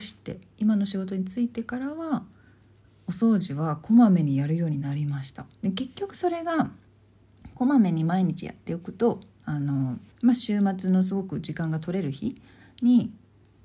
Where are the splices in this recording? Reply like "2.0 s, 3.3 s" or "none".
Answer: 5.5 s, 10.1 s